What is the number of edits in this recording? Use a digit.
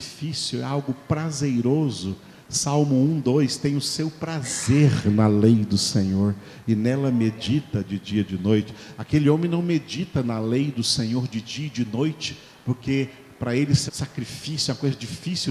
1